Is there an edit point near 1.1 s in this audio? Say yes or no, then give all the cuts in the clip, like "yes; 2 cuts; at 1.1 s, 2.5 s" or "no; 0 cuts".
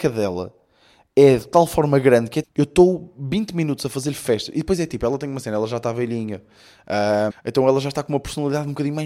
no; 2 cuts; at 2.4 s, 7.3 s